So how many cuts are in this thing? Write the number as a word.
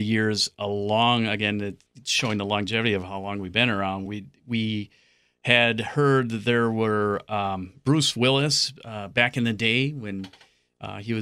zero